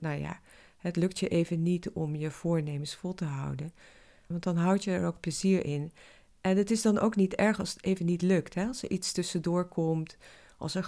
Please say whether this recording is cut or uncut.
cut